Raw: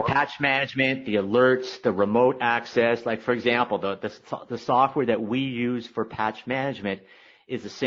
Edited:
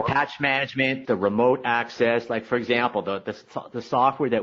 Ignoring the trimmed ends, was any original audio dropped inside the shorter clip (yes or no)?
yes